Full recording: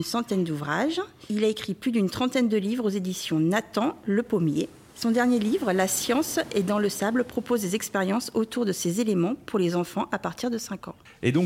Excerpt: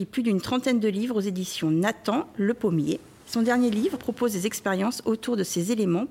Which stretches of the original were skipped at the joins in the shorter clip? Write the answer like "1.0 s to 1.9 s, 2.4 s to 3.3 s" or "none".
5.6 s to 7.2 s